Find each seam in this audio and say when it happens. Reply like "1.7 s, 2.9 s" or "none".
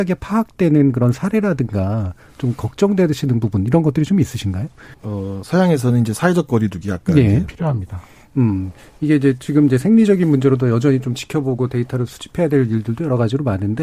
4.9 s, 7.5 s